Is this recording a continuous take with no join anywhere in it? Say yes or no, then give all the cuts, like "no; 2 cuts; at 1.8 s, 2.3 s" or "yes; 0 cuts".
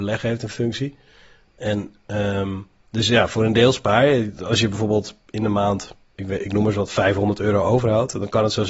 yes; 0 cuts